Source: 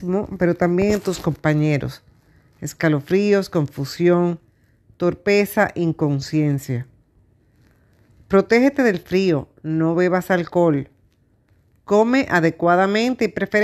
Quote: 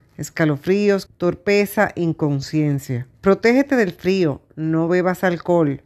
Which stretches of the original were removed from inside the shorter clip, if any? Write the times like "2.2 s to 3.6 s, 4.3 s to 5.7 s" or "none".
3.5 s to 4.9 s, 6.9 s to 8.2 s